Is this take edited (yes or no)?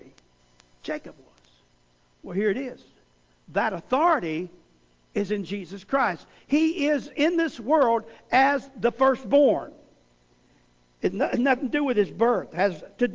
no